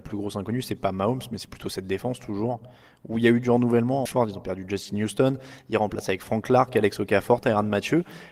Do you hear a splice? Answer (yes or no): yes